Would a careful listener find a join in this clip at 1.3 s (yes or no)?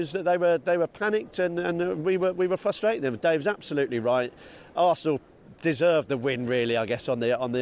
no